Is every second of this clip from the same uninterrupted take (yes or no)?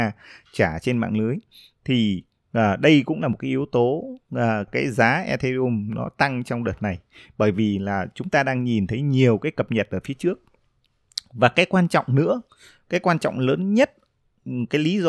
no